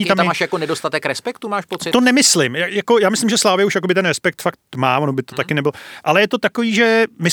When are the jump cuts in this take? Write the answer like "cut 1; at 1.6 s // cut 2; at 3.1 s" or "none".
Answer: none